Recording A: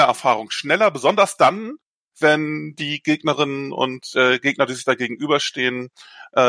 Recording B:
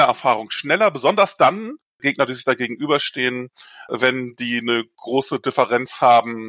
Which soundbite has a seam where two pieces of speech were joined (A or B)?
B